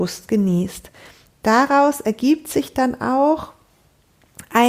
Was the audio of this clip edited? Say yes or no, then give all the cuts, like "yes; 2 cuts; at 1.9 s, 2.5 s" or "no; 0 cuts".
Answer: no; 0 cuts